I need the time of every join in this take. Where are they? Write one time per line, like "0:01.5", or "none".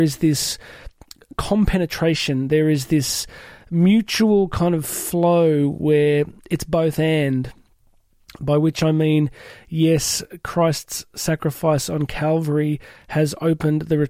none